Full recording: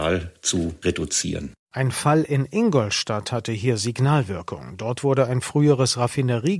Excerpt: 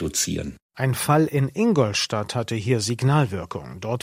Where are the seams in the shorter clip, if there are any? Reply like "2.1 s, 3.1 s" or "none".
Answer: none